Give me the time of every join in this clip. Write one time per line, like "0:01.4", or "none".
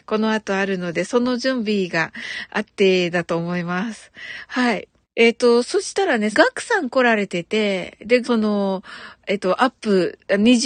0:05.0
0:06.3
0:08.2